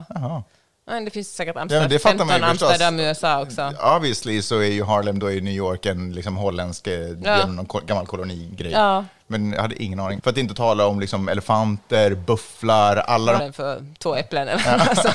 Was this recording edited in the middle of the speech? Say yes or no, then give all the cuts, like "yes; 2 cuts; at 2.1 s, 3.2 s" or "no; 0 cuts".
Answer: yes; 2 cuts; at 10.2 s, 13.4 s